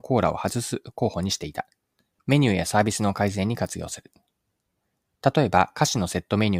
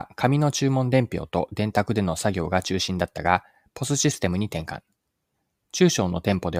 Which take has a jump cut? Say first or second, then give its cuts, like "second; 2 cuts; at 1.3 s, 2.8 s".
first; 1 cut; at 2.2 s